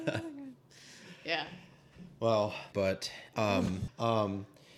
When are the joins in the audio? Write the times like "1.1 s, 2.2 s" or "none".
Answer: 2.7 s, 3.9 s